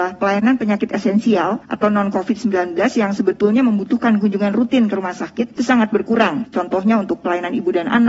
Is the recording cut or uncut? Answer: uncut